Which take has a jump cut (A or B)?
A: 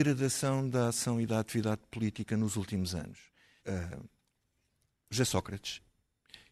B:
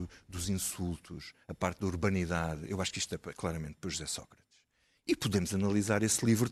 A